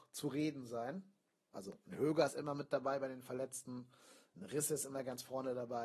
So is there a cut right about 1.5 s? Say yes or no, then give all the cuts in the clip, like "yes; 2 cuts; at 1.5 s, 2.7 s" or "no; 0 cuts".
yes; 1 cut; at 1.5 s